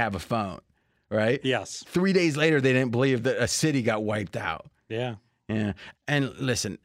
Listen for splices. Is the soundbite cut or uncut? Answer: uncut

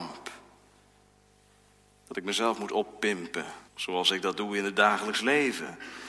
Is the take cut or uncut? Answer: cut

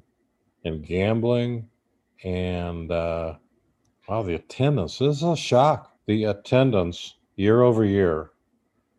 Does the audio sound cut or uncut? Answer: cut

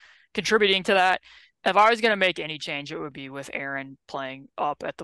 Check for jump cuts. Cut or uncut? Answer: cut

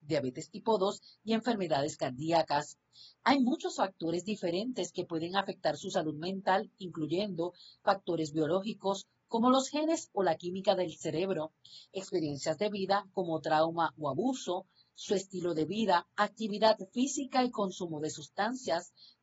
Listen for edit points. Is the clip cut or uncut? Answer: cut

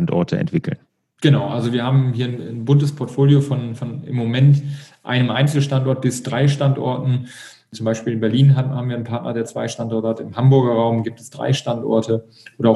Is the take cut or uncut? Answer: uncut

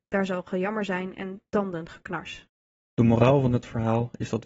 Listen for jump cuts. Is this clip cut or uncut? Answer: uncut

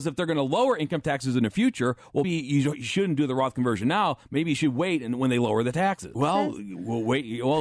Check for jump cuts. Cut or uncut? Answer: cut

